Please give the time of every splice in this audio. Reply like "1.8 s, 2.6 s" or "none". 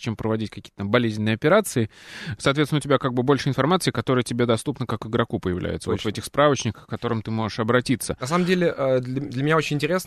2.4 s